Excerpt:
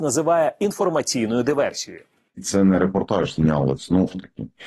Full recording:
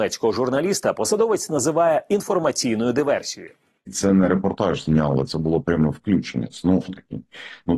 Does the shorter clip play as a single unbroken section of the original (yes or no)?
no